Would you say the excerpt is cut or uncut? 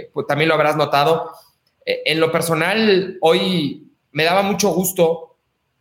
uncut